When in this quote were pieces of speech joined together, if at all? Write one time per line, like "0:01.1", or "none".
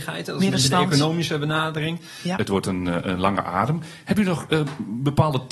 0:02.4